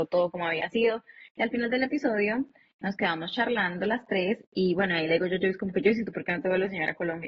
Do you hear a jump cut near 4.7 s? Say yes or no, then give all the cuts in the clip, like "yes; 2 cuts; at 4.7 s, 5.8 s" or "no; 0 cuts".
no; 0 cuts